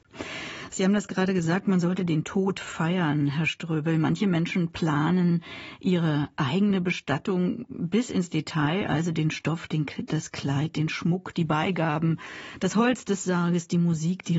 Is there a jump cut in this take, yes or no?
no